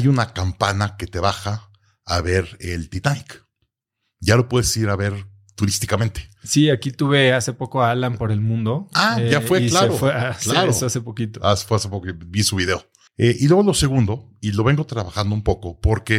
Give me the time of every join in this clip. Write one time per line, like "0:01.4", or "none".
0:13.1